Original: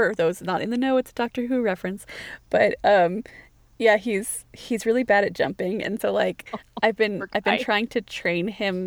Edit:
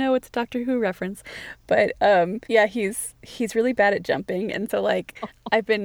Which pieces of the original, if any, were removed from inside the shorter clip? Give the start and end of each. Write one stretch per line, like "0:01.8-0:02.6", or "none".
0:03.3-0:03.7